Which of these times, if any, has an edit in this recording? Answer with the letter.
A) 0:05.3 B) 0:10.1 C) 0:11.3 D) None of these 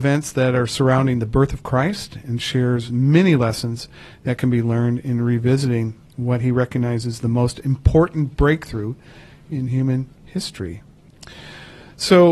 B